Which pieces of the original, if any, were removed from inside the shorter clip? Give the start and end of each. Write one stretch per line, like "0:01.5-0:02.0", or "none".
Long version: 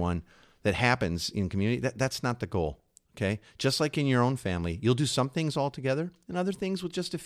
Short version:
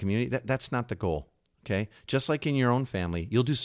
none